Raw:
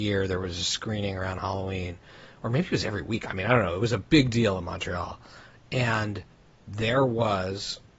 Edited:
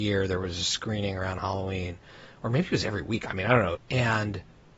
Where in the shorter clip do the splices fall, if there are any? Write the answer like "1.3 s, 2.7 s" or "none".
3.7 s

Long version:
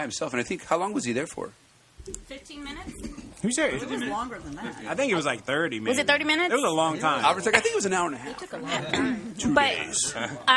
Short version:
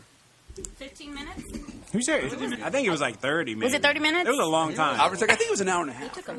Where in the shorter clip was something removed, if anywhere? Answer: 2.6 s

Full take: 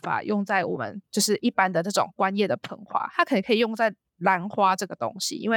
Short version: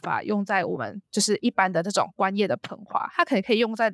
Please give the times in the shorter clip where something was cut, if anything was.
none

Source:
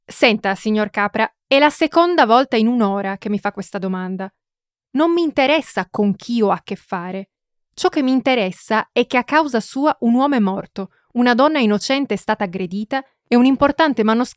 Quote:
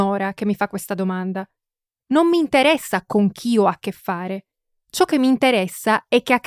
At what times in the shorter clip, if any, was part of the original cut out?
none

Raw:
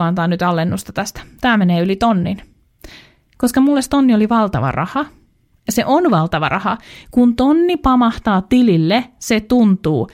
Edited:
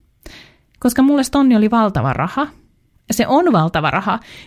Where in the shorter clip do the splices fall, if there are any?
none

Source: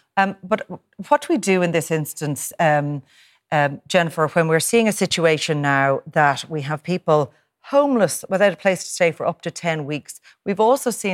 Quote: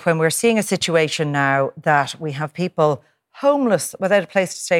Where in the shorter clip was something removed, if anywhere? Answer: none

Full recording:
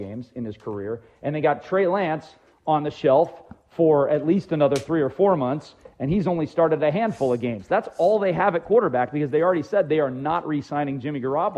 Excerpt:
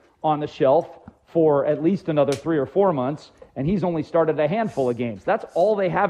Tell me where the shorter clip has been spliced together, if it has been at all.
none

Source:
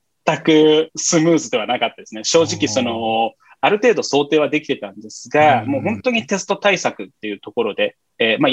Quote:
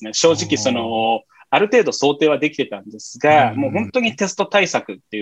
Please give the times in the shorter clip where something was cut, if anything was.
none

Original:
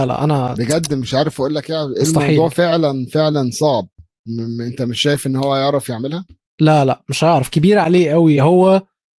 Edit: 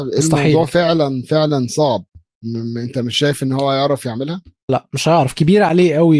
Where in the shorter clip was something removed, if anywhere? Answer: 4.7 s

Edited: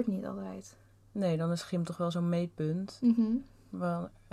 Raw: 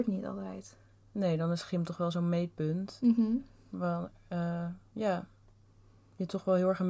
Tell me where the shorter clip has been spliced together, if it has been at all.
none

